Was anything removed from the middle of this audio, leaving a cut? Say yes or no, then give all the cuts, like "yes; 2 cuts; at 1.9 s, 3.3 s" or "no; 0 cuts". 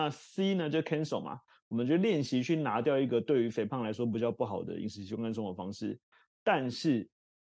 no; 0 cuts